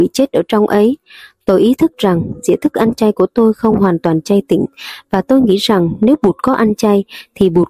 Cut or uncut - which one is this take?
uncut